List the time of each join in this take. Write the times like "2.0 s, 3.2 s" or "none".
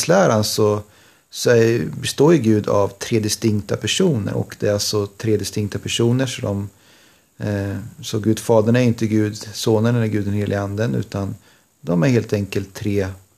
4.3 s